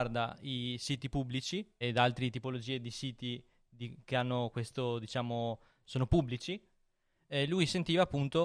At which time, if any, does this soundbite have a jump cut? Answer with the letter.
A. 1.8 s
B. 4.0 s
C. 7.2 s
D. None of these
A